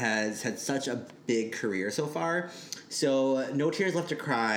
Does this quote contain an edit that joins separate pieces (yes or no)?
no